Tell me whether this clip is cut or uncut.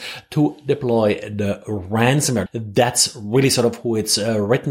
cut